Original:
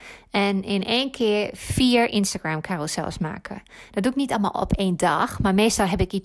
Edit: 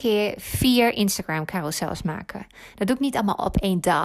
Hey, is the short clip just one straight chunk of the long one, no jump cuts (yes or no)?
yes